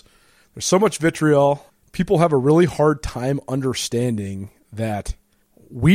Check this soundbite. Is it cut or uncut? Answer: uncut